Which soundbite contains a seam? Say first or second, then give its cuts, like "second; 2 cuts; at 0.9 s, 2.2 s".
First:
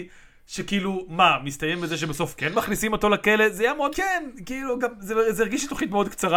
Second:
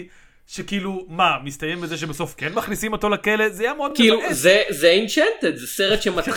first; 1 cut; at 3.9 s